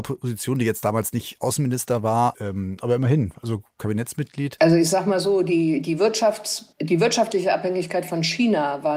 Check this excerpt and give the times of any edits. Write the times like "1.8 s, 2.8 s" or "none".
2.3 s, 4.6 s, 6.7 s